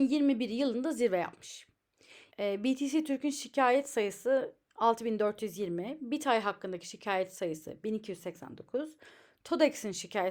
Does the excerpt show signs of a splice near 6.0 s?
no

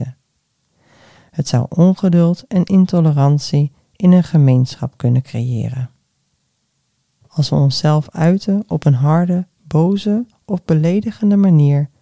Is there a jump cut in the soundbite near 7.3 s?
yes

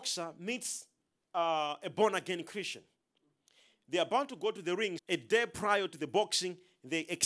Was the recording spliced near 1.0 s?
no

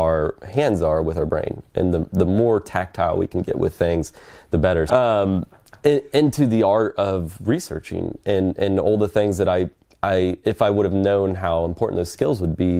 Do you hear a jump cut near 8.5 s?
no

